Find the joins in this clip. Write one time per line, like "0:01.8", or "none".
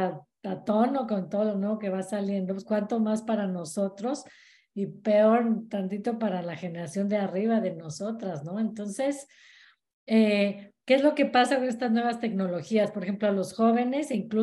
none